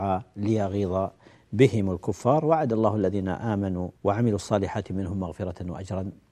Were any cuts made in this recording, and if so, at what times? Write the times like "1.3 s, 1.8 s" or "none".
4.0 s

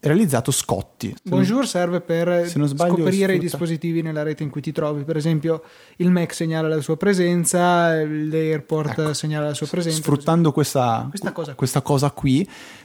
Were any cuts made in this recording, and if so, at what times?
1.1 s

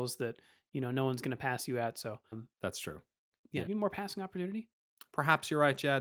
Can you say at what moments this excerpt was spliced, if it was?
2.3 s, 3.7 s

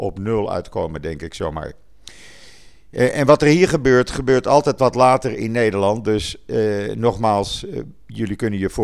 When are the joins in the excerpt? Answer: none

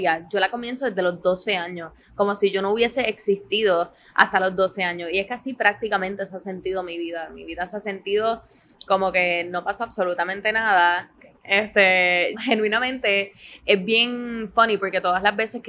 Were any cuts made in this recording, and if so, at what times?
11.2 s, 12.3 s

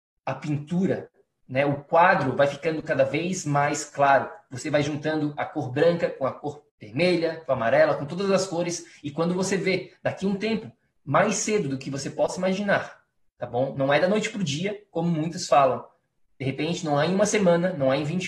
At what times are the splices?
6.7 s

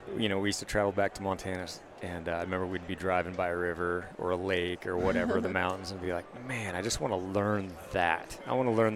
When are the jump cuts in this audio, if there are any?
none

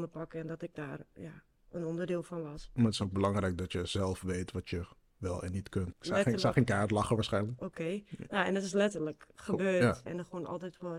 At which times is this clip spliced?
5.9 s, 7.6 s, 10.1 s

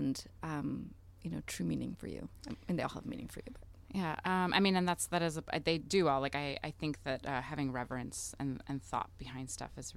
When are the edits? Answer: none

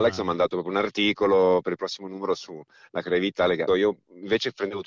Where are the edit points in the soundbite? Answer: 3.7 s

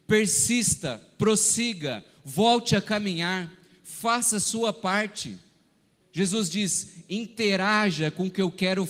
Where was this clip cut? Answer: 6.0 s

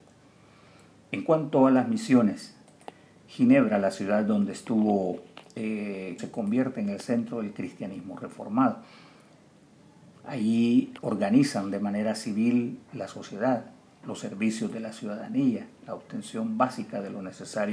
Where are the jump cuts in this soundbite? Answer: 6.2 s

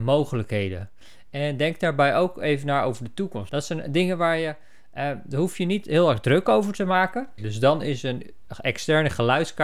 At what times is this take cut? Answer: 3.5 s, 7.4 s

